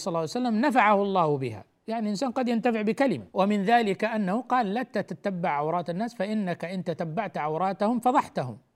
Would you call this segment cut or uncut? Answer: cut